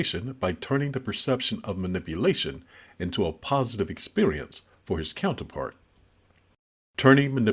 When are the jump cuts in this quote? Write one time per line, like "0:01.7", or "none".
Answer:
none

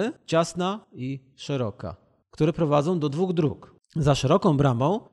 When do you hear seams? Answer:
none

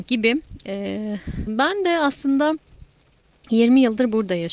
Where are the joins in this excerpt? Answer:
0:01.5

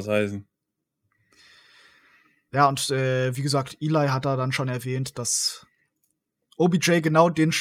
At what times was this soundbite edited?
none

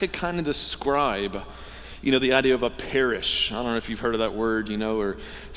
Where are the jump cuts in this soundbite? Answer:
none

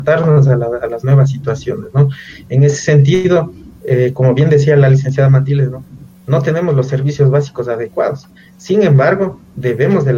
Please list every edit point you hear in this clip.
none

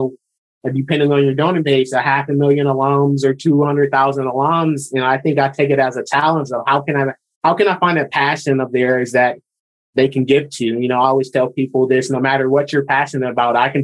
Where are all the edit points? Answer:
none

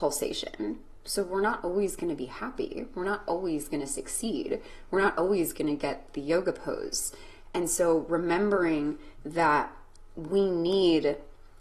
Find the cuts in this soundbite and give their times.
none

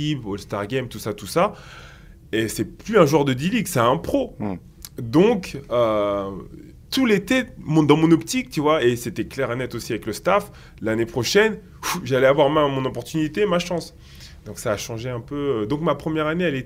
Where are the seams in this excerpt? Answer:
none

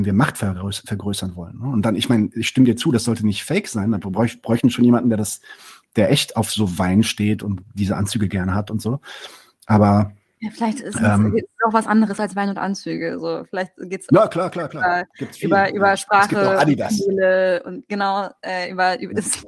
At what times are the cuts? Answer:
none

